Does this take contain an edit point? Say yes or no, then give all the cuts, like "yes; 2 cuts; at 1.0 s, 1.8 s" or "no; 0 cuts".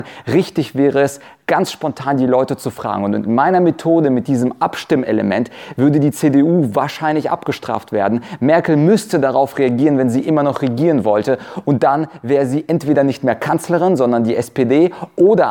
no; 0 cuts